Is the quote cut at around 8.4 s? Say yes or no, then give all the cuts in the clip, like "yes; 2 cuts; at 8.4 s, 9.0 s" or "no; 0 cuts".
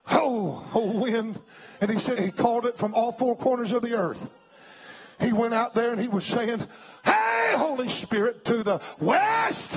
no; 1 cut; at 2.2 s